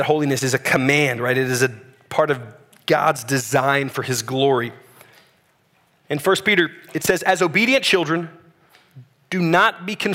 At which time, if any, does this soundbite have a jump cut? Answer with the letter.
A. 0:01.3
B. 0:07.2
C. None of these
C